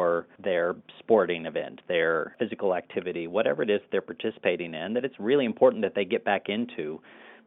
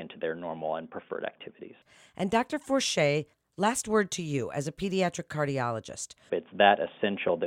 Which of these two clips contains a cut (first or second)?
second